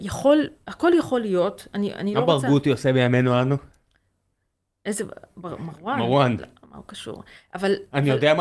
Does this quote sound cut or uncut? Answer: uncut